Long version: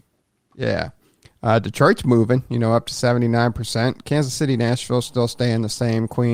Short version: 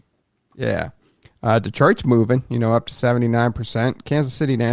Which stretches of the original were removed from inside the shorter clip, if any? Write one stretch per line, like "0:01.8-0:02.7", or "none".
none